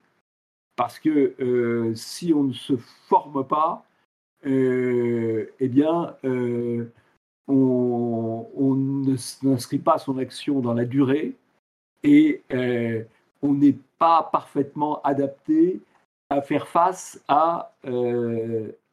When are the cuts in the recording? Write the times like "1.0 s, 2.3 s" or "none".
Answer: none